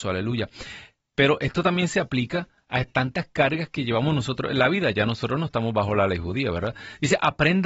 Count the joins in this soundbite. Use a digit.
1